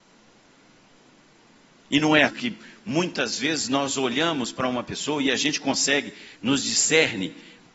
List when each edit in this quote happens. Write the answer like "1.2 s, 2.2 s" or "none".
2.3 s, 6.3 s